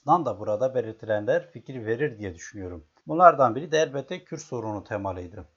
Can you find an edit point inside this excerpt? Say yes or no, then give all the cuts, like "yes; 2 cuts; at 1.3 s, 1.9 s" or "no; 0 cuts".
yes; 1 cut; at 3.0 s